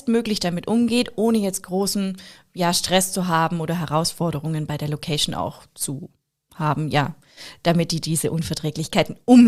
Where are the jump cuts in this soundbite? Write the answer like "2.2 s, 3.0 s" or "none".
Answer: none